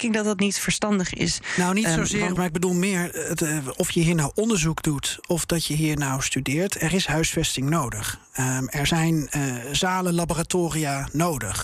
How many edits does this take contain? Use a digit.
1